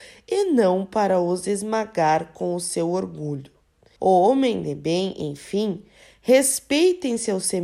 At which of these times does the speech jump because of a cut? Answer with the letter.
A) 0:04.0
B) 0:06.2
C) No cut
A